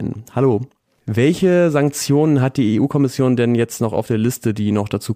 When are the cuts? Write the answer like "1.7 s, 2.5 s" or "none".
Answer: 1.0 s